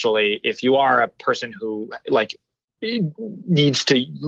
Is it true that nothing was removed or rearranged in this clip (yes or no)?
yes